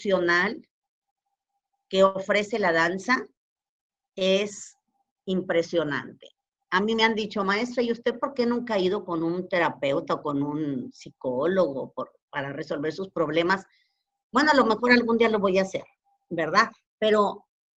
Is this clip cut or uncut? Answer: uncut